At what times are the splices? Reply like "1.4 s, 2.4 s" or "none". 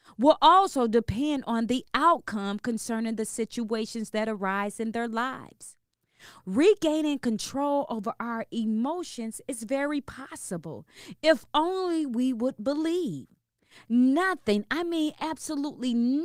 6.4 s